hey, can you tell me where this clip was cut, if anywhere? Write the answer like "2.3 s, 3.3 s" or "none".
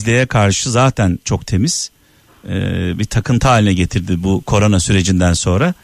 none